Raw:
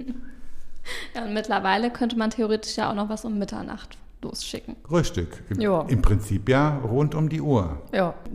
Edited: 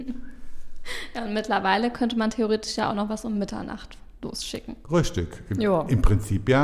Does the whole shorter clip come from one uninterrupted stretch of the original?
yes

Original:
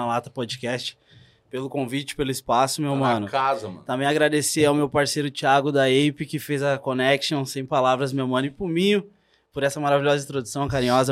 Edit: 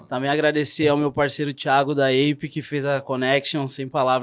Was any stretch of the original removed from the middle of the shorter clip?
no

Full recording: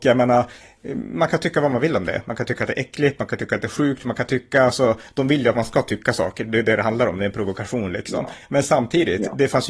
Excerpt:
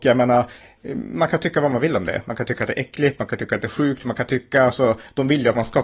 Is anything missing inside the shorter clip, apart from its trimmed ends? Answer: no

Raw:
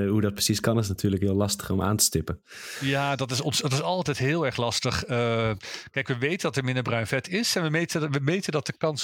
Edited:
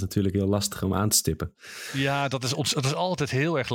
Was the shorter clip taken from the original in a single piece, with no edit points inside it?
yes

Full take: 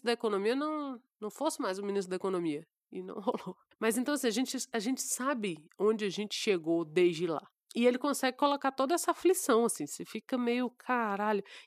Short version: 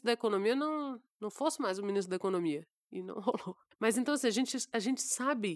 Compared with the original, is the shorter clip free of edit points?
yes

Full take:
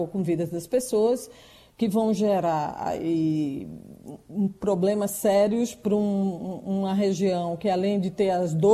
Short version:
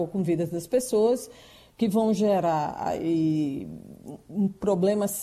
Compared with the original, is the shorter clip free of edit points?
yes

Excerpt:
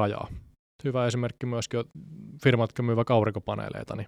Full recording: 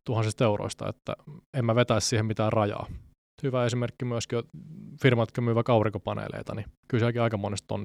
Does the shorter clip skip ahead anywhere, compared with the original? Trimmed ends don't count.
no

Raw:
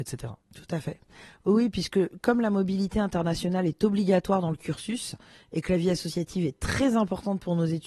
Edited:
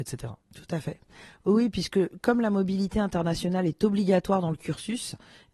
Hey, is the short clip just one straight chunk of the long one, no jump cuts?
yes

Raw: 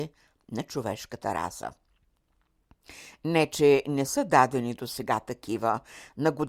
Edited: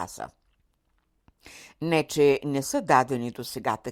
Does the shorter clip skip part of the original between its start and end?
no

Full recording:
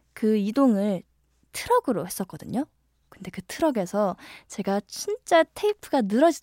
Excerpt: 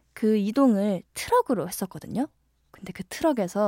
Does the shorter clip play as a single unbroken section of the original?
no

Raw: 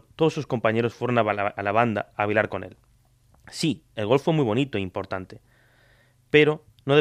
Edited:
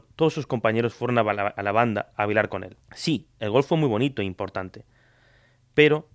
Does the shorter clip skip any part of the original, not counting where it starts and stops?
yes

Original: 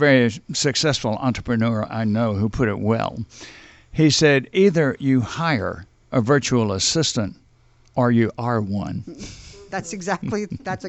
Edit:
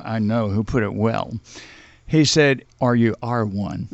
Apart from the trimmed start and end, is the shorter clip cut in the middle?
yes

